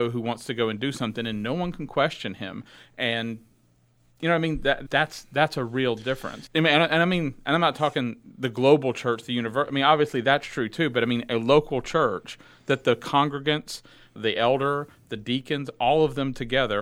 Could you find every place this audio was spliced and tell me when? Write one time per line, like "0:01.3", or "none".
0:04.9
0:06.5
0:14.2